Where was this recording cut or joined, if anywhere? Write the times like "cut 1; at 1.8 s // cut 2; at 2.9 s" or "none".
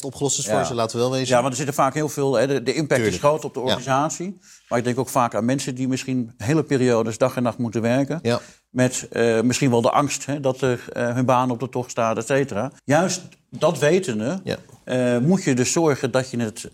cut 1; at 12.8 s